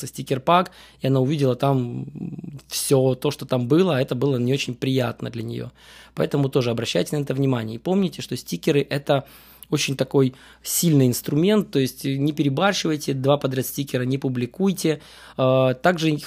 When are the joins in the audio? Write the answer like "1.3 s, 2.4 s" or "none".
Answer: none